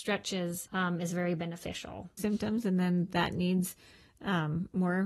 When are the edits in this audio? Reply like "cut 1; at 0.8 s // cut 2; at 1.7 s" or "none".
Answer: cut 1; at 2.2 s